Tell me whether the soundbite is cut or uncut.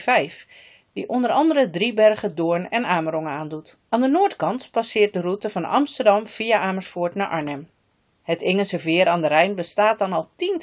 cut